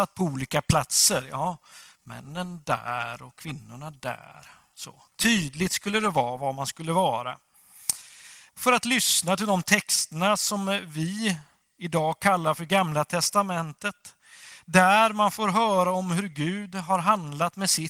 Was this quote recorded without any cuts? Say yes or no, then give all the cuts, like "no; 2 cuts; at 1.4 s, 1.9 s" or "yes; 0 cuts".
no; 1 cut; at 8.5 s